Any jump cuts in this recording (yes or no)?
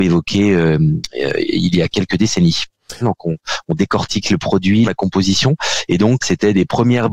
yes